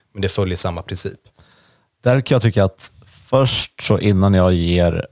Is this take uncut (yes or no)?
yes